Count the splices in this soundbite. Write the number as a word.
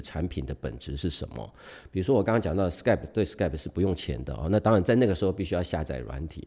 zero